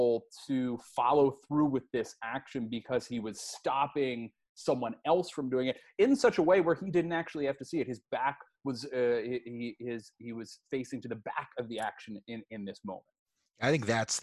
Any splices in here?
no; 0 cuts

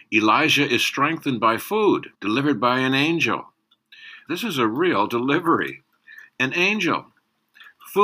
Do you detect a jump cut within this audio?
yes; 2 cuts; at 2.1 s, 4.3 s

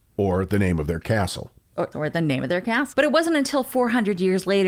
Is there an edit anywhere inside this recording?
yes; 2 cuts; at 1.9 s, 2.9 s

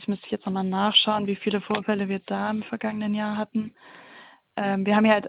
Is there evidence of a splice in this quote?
no; 0 cuts

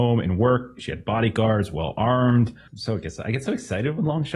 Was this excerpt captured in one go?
no; 1 cut; at 2.7 s

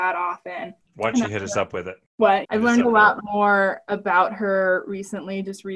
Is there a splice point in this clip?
yes; 1 cut; at 2.4 s

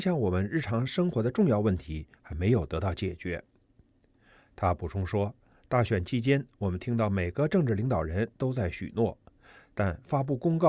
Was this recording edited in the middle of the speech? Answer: no; 0 cuts

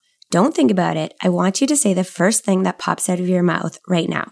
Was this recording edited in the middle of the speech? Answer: no; 0 cuts

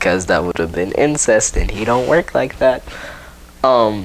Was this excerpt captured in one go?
yes; 0 cuts

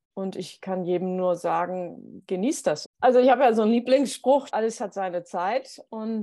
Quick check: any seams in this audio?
yes; 2 cuts; at 2.8 s, 4.5 s

